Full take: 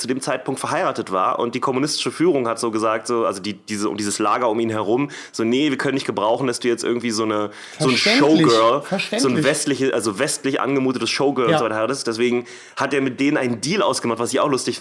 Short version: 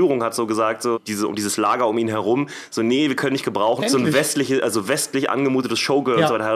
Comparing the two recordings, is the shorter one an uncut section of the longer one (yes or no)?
no